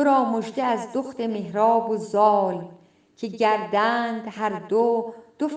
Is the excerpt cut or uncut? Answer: uncut